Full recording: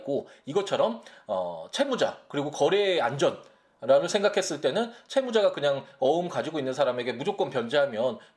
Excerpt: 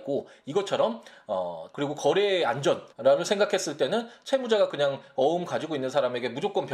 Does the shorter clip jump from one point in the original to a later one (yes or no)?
yes